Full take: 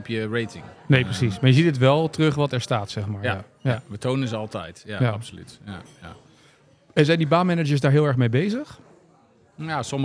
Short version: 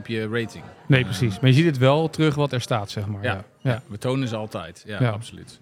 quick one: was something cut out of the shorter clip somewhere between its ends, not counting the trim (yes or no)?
no